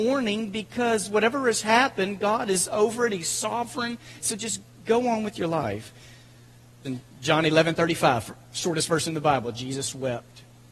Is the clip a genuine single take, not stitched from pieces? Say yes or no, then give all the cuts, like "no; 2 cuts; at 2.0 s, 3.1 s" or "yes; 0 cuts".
no; 2 cuts; at 4.2 s, 6.8 s